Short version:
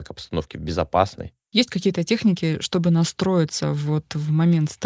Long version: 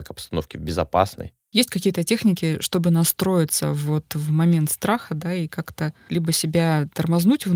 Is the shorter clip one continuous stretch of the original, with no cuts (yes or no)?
yes